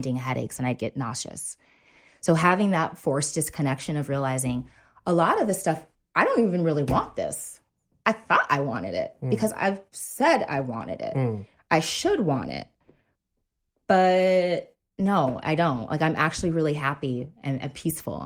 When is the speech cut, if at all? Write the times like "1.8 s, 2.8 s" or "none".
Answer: none